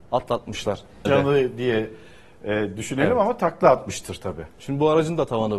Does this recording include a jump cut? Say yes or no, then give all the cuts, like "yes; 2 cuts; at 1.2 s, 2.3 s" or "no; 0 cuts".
yes; 1 cut; at 1.1 s